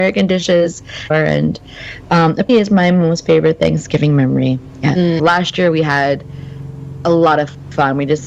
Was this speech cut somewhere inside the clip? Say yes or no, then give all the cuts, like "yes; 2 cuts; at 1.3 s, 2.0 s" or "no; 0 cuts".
yes; 3 cuts; at 1.1 s, 2.5 s, 5.2 s